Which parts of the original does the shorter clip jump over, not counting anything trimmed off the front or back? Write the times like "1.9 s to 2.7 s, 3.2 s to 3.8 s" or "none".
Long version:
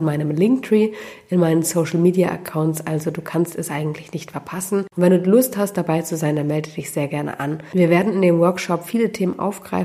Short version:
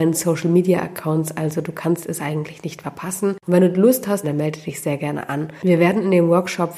5.7 s to 6.3 s